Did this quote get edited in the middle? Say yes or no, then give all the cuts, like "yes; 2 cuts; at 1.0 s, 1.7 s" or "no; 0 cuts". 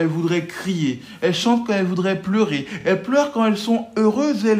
no; 0 cuts